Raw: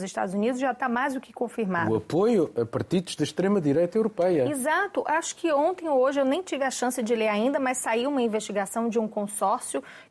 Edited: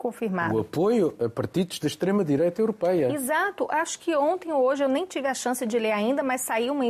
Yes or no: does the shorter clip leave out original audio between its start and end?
no